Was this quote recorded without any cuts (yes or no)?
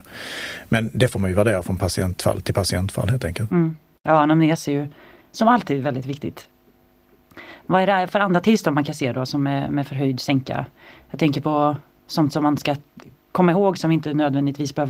yes